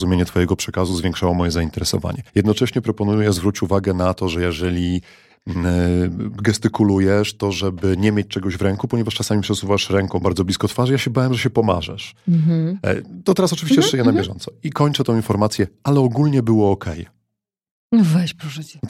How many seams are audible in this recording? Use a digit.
1